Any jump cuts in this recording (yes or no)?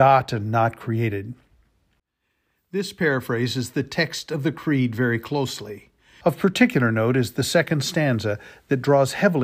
yes